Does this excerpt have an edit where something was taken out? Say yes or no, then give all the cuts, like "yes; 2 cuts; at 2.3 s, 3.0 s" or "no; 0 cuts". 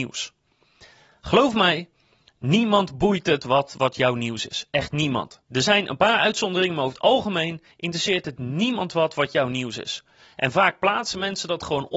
yes; 1 cut; at 5.5 s